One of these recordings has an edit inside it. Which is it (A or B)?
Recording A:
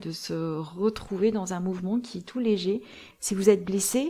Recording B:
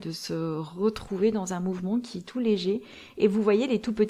A